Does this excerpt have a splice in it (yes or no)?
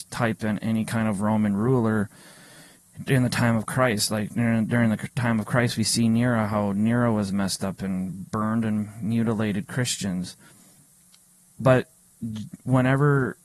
no